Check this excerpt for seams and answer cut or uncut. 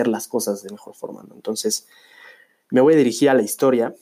uncut